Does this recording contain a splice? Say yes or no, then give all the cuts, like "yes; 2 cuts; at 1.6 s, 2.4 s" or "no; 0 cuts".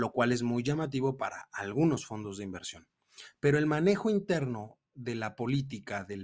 yes; 1 cut; at 4.9 s